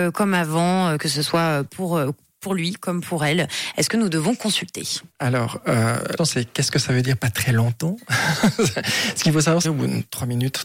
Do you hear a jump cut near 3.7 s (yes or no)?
no